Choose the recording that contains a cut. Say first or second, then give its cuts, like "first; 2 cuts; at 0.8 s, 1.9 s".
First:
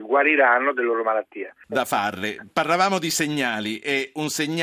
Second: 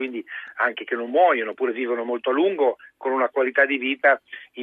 first; 1 cut; at 1.6 s